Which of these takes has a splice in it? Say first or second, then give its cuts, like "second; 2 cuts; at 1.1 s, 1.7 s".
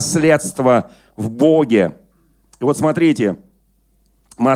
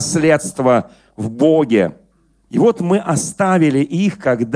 second; 1 cut; at 2.5 s